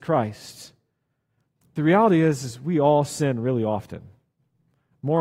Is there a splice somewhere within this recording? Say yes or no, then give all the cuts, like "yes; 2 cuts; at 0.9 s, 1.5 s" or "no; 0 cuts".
yes; 1 cut; at 1.6 s